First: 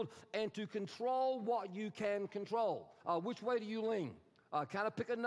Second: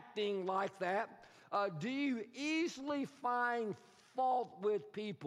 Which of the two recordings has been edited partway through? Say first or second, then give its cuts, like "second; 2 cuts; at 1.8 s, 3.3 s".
first; 1 cut; at 3.0 s